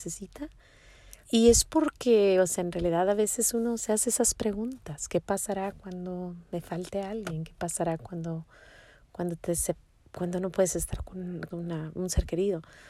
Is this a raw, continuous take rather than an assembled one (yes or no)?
no